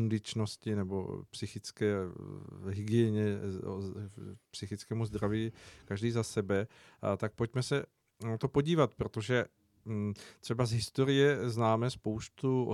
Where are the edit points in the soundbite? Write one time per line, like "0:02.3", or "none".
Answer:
none